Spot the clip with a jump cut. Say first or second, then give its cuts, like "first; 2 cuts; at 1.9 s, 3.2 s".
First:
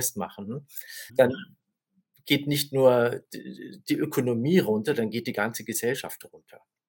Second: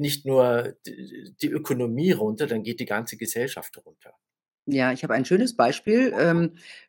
first; 1 cut; at 1.1 s